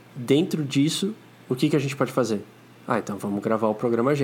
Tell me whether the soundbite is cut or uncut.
uncut